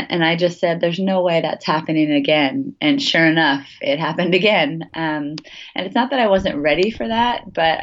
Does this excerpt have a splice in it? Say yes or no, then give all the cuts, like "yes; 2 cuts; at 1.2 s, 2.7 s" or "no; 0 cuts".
no; 0 cuts